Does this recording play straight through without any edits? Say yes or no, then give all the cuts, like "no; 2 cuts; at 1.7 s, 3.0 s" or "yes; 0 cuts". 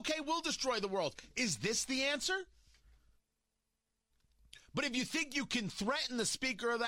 yes; 0 cuts